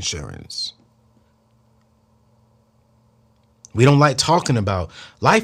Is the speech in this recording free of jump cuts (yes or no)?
yes